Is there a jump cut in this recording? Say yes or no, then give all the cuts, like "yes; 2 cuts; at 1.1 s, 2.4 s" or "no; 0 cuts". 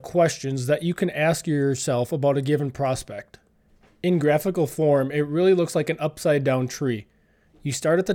no; 0 cuts